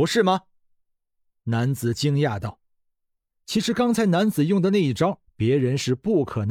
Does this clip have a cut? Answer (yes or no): yes